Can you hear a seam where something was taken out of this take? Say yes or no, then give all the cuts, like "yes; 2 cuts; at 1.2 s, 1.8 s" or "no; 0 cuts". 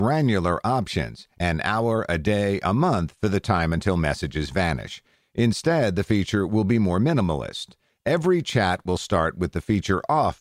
no; 0 cuts